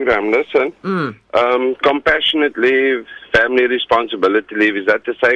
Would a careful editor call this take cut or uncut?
uncut